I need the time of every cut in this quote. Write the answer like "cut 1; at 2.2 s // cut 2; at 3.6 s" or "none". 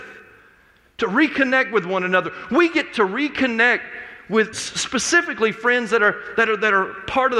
cut 1; at 4.5 s